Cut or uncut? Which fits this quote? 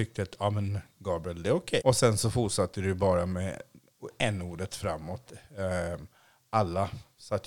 cut